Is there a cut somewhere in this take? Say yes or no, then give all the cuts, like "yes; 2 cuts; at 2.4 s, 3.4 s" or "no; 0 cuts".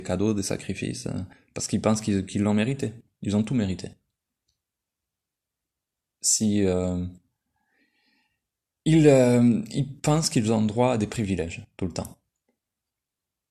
no; 0 cuts